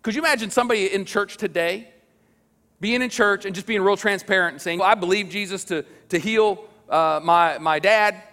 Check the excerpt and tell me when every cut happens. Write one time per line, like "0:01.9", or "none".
0:04.8